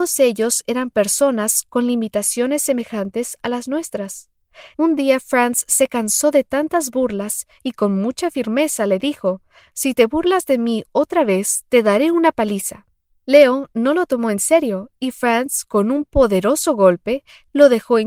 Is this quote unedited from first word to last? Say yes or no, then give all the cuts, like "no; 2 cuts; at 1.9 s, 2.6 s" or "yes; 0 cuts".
no; 1 cut; at 4.7 s